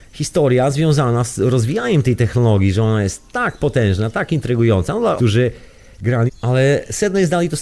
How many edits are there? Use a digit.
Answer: 2